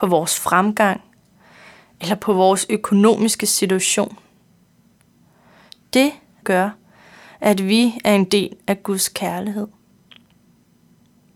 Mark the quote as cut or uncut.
cut